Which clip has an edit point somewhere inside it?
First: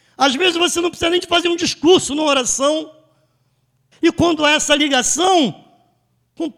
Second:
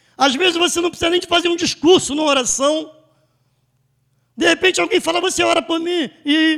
first; 1 cut; at 3.9 s

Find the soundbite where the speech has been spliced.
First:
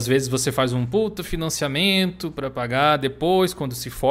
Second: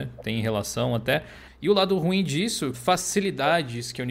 second; 2 cuts; at 1.5 s, 2.7 s

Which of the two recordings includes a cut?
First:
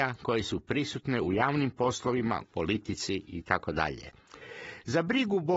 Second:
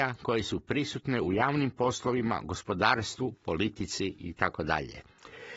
first; 1 cut; at 2.4 s

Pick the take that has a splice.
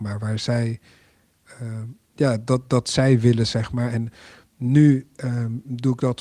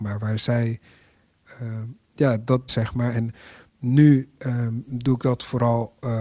second; 1 cut; at 2.7 s

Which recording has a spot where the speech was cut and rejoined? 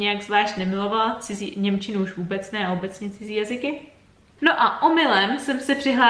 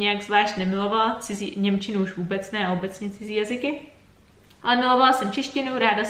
first; 1 cut; at 4.4 s

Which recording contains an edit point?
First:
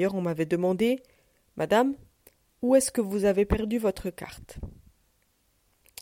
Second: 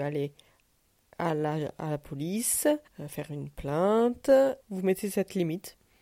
second; 2 cuts; at 2.9 s, 4.6 s

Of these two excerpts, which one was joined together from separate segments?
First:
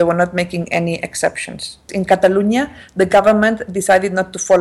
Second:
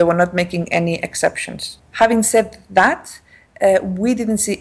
second; 1 cut; at 1.8 s

